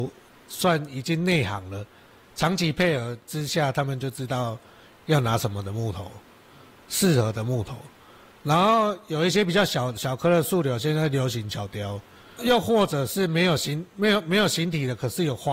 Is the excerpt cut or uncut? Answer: uncut